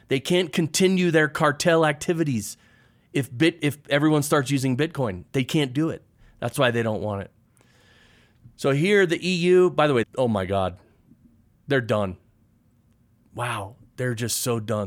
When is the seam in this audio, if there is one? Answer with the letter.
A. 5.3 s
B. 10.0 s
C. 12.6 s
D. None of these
B